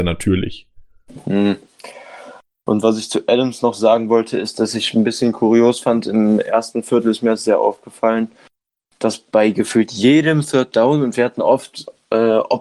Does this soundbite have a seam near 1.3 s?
no; 0 cuts

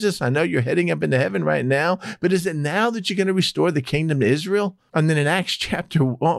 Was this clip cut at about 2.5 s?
no; 1 cut; at 4.9 s

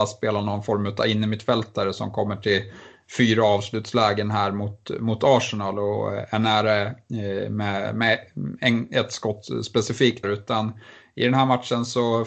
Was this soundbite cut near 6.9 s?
no; 1 cut; at 10.2 s

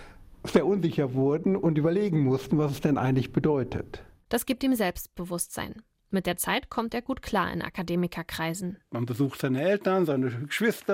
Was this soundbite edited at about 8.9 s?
yes; 1 cut; at 8.9 s

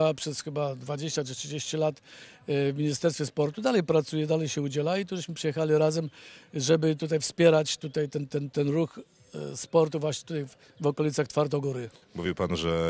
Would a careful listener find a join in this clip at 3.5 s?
no; 0 cuts

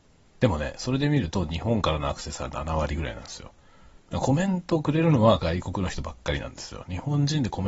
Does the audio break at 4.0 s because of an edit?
yes; 1 cut; at 4.0 s

